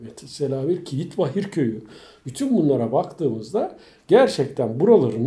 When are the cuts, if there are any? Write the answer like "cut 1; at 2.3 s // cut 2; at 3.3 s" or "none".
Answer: none